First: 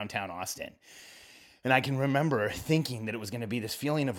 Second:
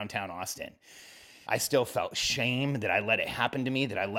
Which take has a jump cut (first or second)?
second